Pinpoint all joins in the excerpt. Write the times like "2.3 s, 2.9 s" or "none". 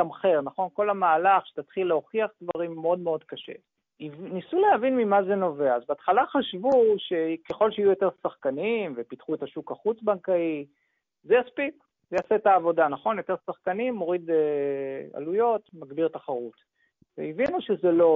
3.8 s